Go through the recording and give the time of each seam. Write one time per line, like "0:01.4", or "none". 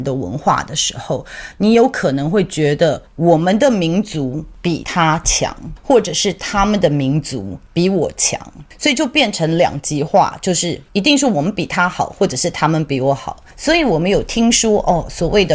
none